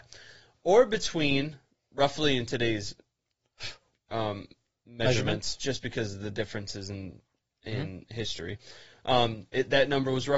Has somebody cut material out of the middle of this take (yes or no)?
no